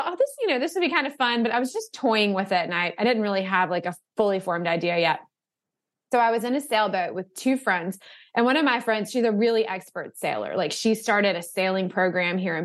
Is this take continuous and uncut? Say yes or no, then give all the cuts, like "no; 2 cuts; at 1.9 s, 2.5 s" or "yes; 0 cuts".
yes; 0 cuts